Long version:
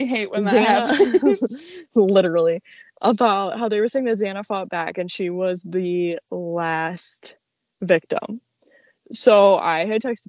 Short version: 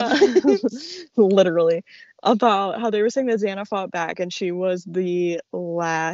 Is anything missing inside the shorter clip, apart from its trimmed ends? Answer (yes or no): no